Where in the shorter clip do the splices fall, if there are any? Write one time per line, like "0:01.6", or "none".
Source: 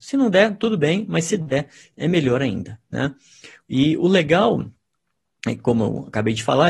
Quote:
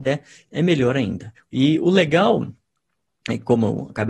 0:01.4

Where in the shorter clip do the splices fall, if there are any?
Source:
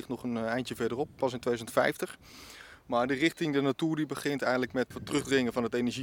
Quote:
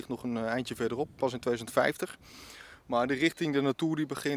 none

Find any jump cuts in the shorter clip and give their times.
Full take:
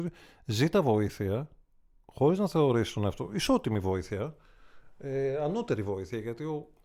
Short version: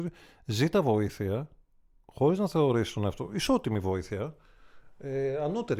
none

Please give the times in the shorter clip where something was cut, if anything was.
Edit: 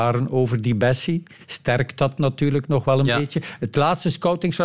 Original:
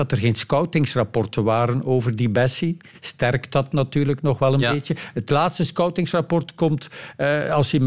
none

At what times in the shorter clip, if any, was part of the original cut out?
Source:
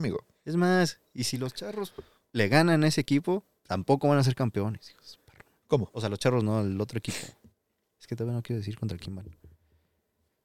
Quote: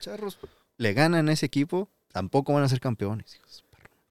none

